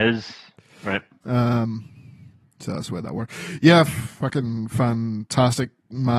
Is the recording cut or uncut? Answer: cut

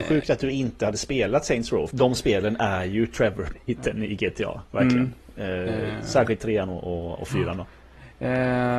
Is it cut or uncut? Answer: cut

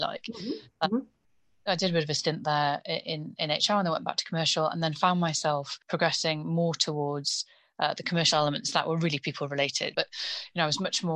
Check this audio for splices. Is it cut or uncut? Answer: cut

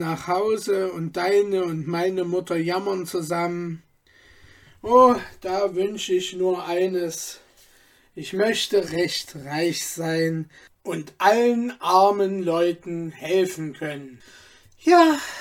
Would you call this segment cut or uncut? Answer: cut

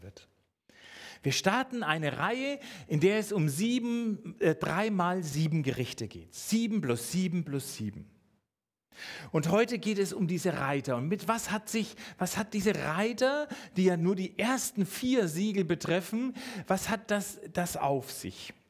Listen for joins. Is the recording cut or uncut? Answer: uncut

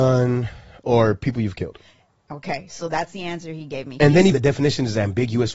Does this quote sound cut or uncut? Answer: cut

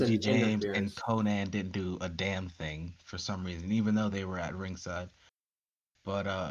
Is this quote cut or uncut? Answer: uncut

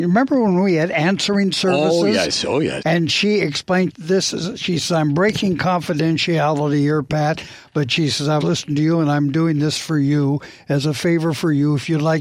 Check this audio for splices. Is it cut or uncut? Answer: cut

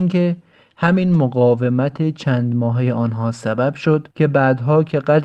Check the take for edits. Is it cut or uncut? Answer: cut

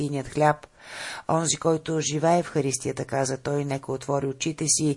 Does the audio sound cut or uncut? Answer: uncut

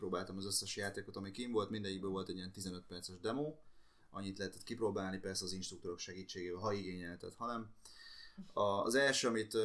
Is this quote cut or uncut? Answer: uncut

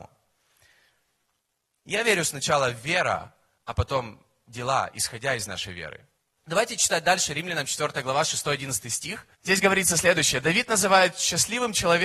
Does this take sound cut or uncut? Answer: cut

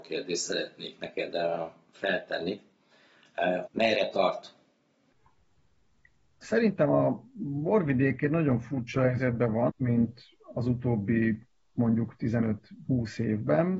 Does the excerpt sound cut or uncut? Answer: cut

